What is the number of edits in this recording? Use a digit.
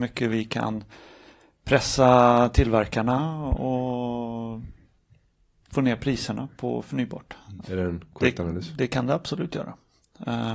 1